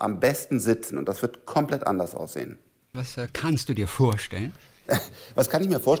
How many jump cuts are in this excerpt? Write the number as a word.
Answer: one